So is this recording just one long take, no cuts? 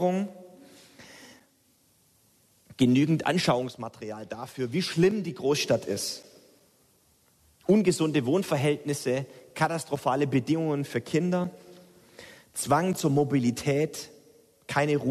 yes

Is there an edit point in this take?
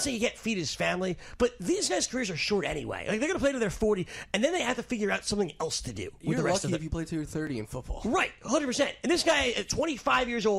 no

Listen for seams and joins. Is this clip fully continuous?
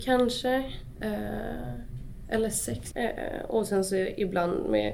no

